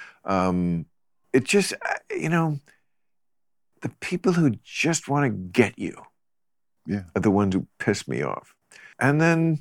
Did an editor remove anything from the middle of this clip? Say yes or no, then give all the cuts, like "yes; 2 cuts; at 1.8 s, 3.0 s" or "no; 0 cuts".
no; 0 cuts